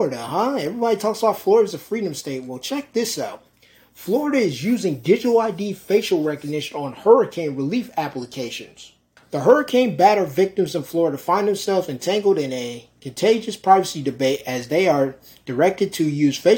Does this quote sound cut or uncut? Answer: cut